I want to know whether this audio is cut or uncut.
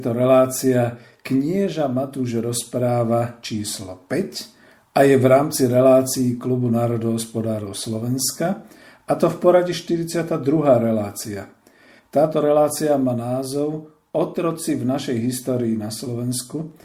uncut